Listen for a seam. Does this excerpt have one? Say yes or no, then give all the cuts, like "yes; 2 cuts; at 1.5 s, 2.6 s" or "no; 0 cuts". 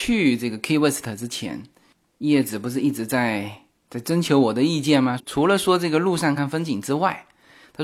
yes; 2 cuts; at 5.2 s, 6.4 s